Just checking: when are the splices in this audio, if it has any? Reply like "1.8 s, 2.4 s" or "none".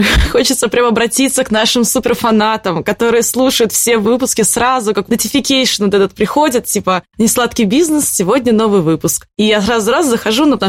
5.1 s